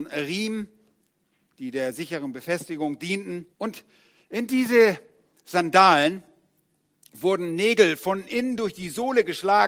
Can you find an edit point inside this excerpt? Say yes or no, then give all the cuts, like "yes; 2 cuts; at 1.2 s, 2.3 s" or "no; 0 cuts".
yes; 1 cut; at 3.5 s